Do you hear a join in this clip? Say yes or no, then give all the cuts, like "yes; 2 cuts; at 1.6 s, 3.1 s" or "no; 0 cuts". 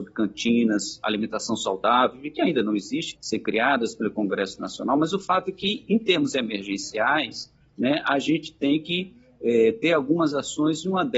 yes; 1 cut; at 3.1 s